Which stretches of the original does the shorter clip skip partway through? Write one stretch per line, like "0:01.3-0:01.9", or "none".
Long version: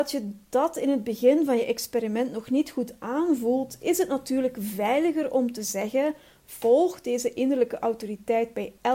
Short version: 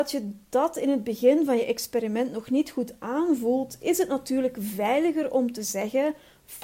none